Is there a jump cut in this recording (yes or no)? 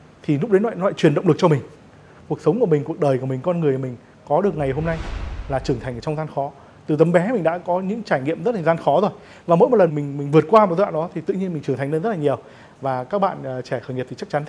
yes